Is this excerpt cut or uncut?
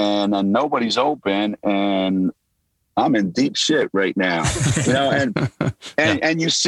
uncut